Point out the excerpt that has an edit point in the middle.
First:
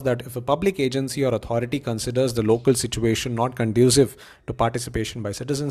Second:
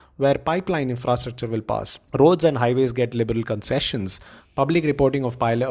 second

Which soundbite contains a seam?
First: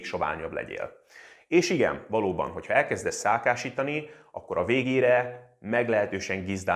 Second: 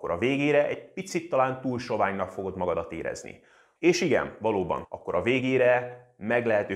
second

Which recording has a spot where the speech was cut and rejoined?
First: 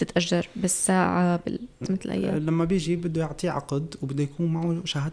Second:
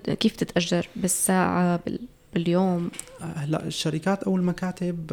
first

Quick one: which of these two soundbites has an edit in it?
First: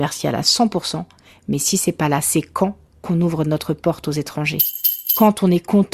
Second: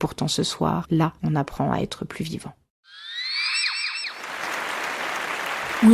second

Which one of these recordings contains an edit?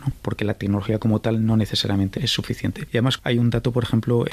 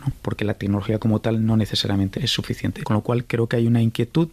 second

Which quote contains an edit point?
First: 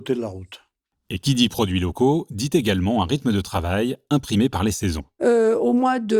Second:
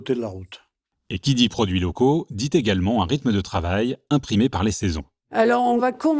first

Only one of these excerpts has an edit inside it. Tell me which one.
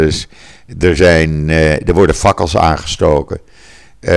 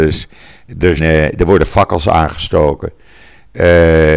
second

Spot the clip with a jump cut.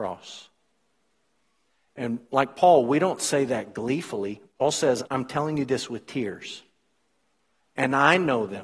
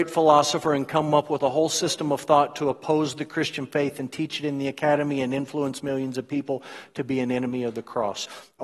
first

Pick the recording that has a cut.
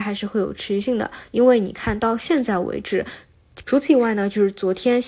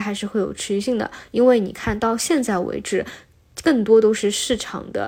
first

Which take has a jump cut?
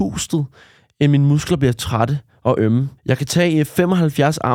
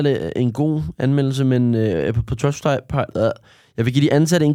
first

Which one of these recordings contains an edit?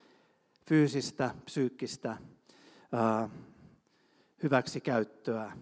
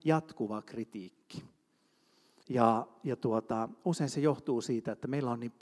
second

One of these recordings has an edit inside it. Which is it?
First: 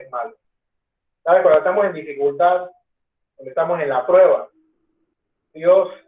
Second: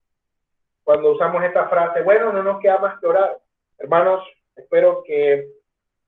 second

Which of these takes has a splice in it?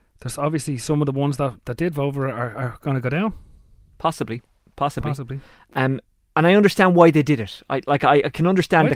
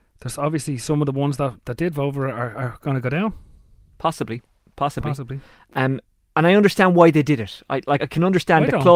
second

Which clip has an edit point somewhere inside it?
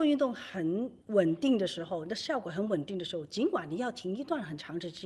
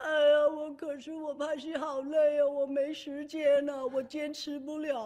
first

